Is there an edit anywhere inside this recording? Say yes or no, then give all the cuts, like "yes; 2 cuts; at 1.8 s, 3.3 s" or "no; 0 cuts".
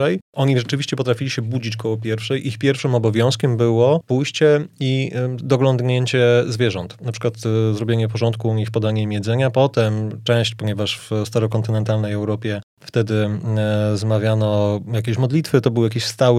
no; 0 cuts